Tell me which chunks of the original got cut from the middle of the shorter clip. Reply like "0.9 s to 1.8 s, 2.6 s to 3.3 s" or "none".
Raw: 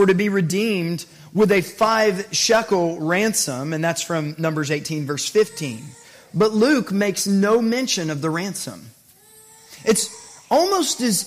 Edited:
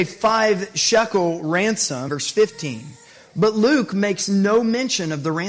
3.7 s to 5.1 s